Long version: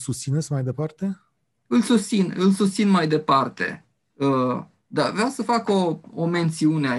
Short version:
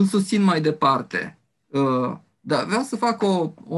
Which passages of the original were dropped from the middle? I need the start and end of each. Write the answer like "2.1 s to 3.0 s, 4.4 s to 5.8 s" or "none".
none